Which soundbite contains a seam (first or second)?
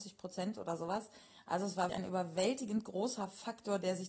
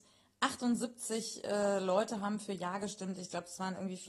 first